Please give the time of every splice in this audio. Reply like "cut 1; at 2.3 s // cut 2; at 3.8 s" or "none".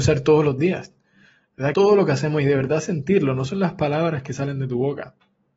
cut 1; at 1.7 s